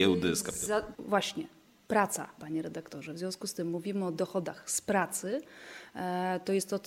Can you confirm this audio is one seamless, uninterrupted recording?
no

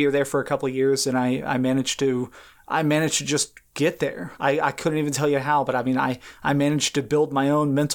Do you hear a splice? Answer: no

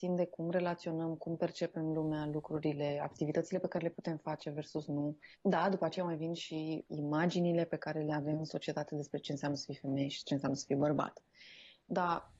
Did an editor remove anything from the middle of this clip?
yes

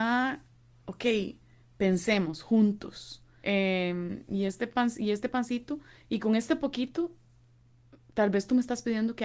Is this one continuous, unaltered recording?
no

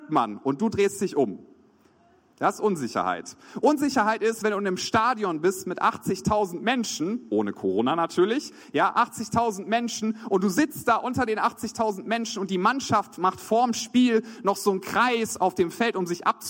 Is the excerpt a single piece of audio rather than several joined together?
yes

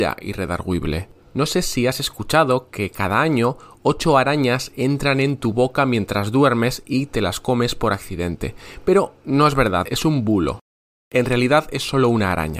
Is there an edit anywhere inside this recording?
yes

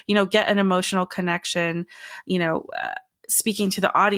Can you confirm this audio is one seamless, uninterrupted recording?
yes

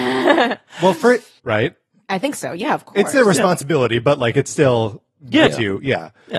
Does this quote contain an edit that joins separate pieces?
yes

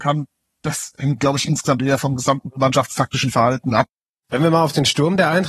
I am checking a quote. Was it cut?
no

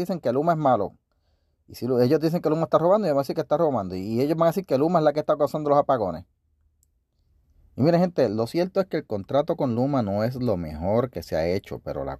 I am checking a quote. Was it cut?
no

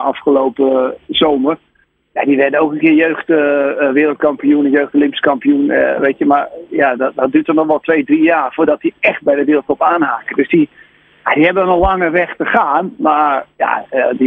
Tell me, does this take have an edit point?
no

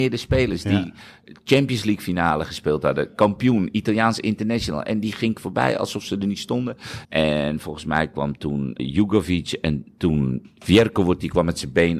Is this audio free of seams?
no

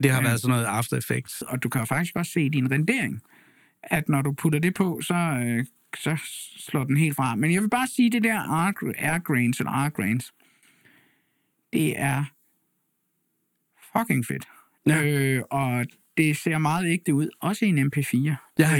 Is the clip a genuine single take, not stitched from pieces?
no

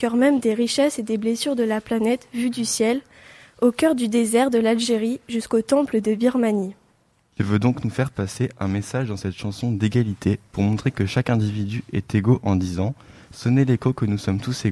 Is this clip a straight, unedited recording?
yes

